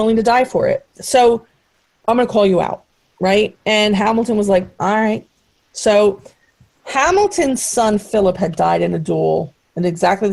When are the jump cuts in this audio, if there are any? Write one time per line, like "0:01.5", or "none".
none